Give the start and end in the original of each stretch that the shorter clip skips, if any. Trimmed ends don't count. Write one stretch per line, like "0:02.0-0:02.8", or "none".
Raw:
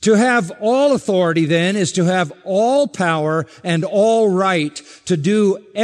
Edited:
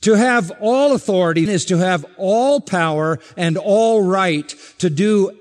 0:01.5-0:01.7